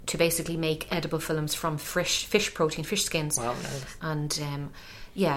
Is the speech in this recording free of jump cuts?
no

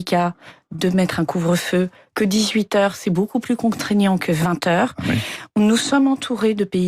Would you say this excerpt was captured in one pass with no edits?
yes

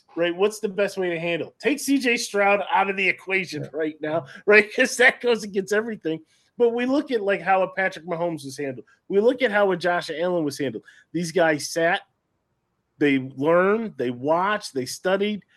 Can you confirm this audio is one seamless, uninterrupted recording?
yes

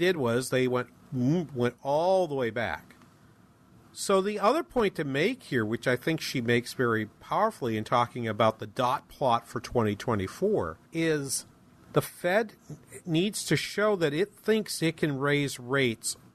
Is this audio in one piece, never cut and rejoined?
no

